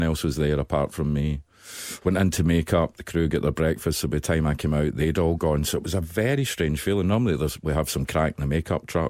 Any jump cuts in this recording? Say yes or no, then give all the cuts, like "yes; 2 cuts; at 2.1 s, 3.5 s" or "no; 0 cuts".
no; 0 cuts